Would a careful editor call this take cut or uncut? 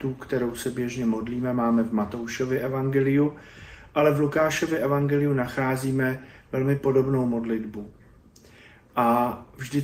uncut